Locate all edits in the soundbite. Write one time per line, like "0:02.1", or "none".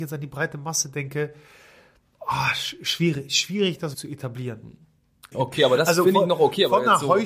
0:03.9
0:05.3